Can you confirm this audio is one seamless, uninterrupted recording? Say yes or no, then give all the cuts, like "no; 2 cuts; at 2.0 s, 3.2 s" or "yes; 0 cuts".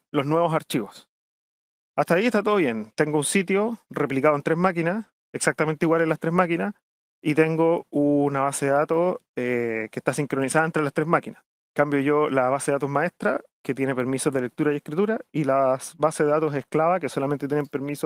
yes; 0 cuts